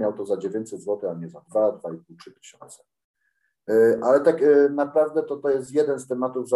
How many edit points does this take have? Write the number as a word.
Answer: zero